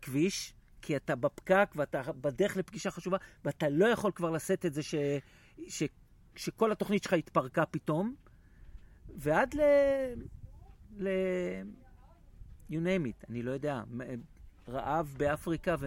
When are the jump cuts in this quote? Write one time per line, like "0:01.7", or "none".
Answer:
none